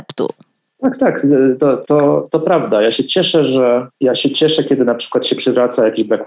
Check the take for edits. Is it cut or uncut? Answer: cut